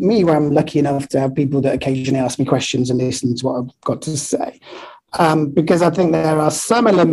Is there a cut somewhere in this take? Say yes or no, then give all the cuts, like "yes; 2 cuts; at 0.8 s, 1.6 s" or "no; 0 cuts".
no; 0 cuts